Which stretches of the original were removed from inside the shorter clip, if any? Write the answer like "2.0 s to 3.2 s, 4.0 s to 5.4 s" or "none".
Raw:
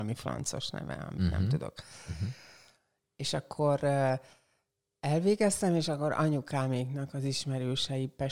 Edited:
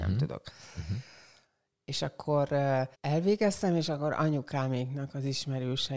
4.3 s to 4.9 s